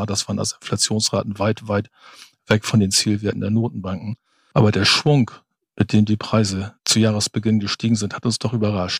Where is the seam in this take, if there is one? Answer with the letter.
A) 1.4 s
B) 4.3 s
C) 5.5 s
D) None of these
D